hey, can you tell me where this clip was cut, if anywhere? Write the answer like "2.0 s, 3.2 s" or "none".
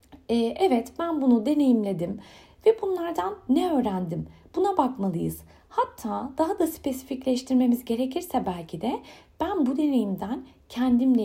none